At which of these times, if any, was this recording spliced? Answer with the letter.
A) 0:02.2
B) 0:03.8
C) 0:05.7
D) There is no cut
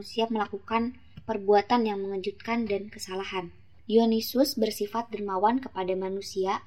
B